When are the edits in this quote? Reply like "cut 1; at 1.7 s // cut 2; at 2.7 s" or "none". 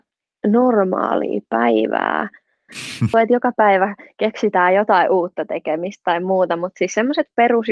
cut 1; at 3.1 s